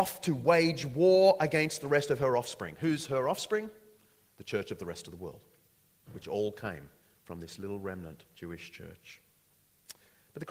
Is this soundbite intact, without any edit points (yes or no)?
yes